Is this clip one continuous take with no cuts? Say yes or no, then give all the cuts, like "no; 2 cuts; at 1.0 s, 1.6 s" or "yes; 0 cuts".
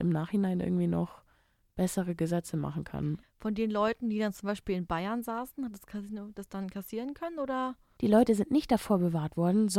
no; 2 cuts; at 3.2 s, 8.0 s